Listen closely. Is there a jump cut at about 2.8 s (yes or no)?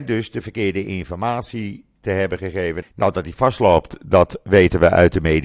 yes